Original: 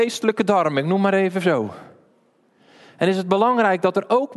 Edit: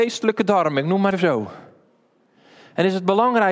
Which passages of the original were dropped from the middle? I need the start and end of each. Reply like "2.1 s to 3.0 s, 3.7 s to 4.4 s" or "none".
1.1 s to 1.3 s